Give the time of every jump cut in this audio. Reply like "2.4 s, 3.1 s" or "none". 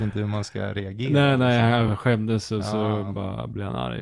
none